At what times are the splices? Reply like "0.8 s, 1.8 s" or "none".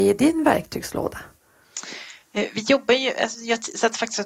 none